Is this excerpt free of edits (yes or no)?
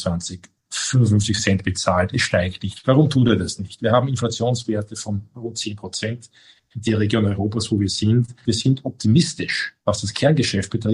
no